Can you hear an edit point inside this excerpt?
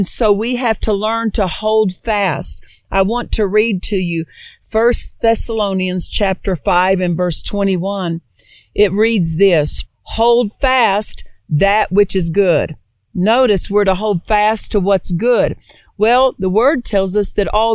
yes; 1 cut; at 9.9 s

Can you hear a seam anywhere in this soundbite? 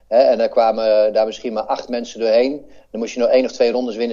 no; 0 cuts

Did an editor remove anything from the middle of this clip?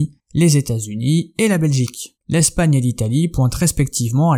no; 0 cuts

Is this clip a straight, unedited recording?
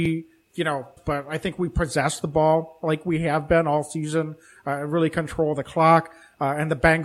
no; 1 cut; at 1.0 s

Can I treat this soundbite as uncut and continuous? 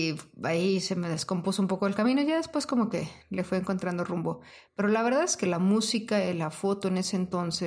yes; 0 cuts

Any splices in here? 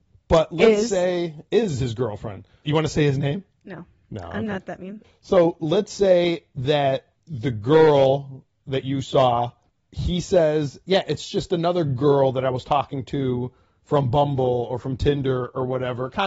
yes; 1 cut; at 2.6 s

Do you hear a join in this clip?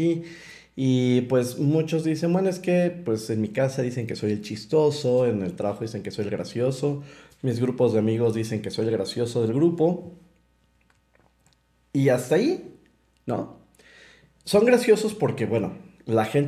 no; 0 cuts

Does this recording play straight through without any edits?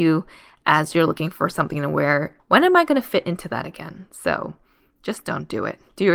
no; 1 cut; at 2.4 s

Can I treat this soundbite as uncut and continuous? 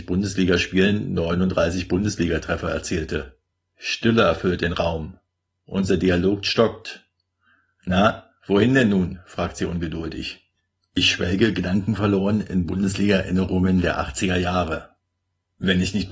yes; 0 cuts

